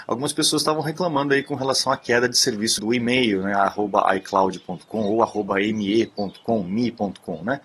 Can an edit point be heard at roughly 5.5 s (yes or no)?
no